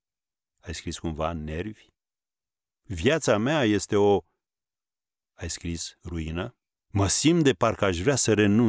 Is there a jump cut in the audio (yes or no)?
yes